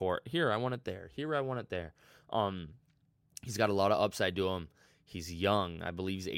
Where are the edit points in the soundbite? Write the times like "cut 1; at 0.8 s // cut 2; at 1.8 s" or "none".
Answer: none